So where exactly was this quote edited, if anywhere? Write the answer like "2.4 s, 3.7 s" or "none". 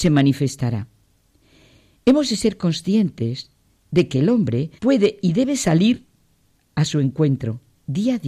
4.8 s